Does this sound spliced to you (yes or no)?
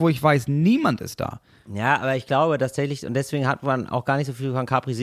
no